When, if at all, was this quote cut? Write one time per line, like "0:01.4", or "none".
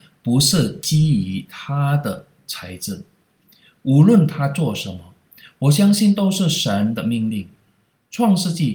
none